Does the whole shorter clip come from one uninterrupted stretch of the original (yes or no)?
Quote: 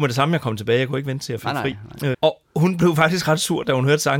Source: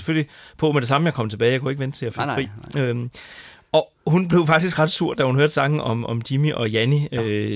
no